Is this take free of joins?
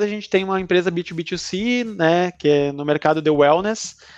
yes; 0 cuts

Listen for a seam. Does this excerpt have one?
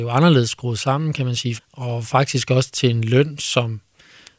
yes; 1 cut; at 1.6 s

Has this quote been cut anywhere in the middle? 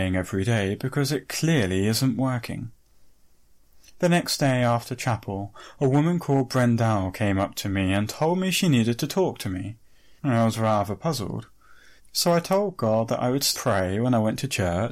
yes; 3 cuts; at 10.2 s, 12.0 s, 13.5 s

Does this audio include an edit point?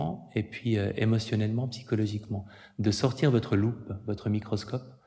no; 0 cuts

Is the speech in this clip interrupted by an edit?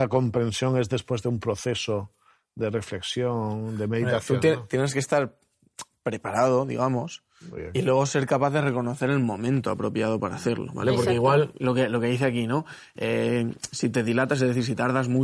no; 0 cuts

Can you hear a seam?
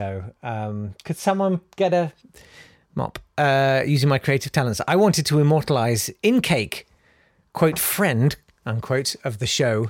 no; 0 cuts

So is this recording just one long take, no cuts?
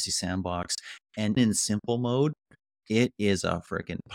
no; 1 cut; at 1.4 s

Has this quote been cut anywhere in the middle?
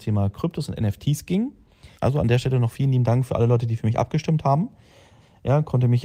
yes; 1 cut; at 1.9 s

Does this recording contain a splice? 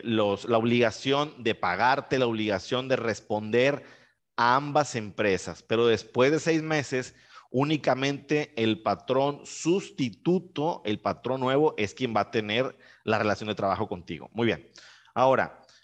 no; 0 cuts

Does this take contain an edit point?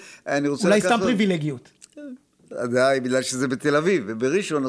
no; 0 cuts

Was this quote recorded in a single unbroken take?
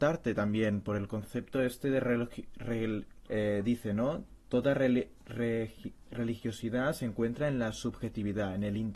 no; 1 cut; at 3.3 s

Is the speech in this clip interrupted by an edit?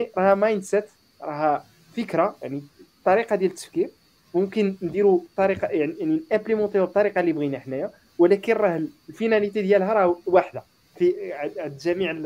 no; 0 cuts

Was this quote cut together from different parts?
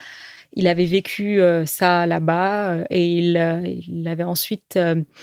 no; 0 cuts

